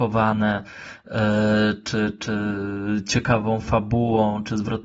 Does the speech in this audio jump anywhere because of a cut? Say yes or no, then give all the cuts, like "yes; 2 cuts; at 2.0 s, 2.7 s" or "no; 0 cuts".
no; 0 cuts